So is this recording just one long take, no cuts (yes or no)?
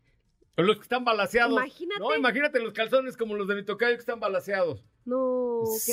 yes